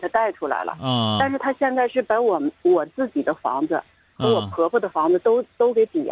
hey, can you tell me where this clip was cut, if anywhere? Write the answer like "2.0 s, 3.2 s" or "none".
none